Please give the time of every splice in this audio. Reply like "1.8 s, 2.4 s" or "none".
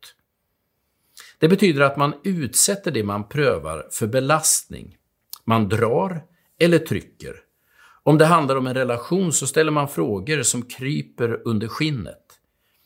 none